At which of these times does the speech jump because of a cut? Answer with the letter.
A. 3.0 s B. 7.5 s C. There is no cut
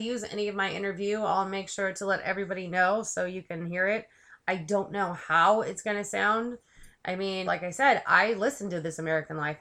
B